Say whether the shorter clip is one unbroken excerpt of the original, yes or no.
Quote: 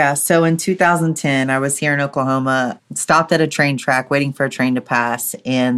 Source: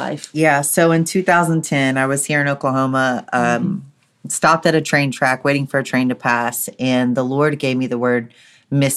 no